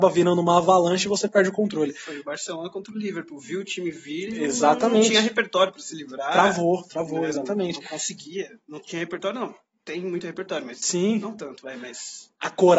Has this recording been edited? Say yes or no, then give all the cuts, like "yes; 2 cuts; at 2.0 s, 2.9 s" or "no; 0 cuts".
no; 0 cuts